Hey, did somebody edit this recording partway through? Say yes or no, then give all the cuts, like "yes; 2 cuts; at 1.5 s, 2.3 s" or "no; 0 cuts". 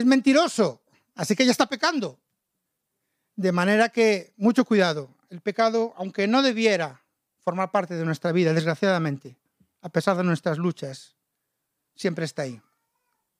no; 0 cuts